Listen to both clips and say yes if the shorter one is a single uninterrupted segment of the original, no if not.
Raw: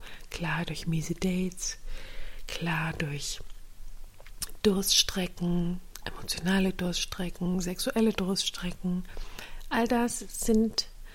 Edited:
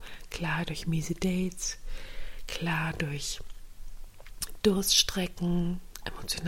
yes